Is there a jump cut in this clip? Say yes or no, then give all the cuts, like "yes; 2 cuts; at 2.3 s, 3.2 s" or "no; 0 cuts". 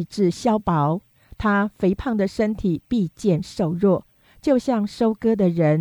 no; 0 cuts